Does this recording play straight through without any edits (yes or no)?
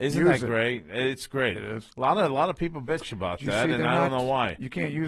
no